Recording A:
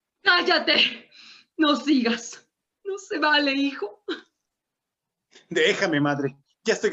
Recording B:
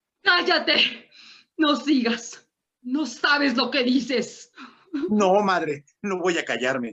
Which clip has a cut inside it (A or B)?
A